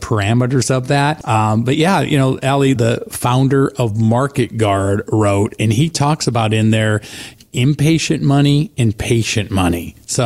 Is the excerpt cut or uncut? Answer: cut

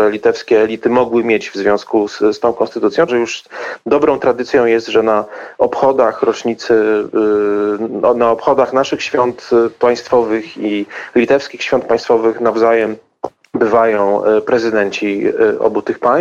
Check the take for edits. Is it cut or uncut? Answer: cut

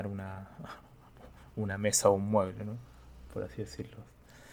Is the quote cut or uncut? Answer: uncut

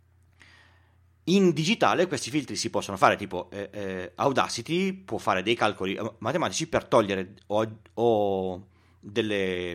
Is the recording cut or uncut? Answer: uncut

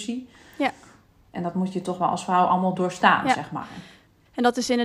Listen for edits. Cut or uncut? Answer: uncut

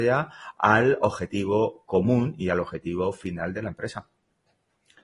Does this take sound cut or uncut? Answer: uncut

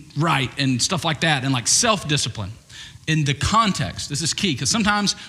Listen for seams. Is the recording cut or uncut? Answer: cut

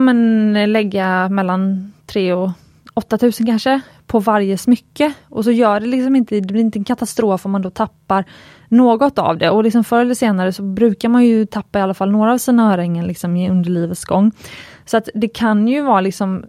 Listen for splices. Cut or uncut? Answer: uncut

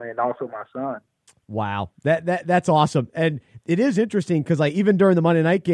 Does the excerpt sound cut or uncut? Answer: uncut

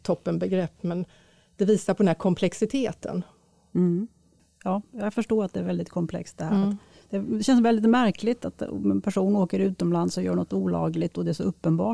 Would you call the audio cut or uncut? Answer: cut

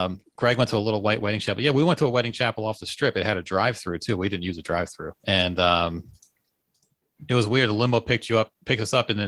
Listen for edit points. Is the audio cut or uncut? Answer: cut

